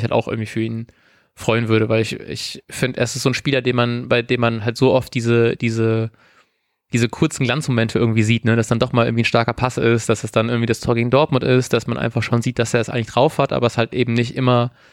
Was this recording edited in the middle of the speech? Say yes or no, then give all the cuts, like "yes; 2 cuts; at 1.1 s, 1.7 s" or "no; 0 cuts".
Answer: no; 0 cuts